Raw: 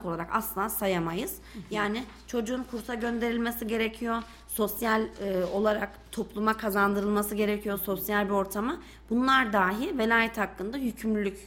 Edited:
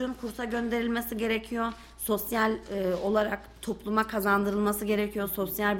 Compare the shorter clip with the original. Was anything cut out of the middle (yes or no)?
no